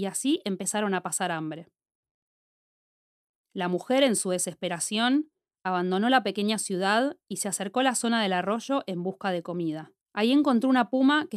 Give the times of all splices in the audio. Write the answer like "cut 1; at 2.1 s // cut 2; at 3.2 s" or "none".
cut 1; at 10.0 s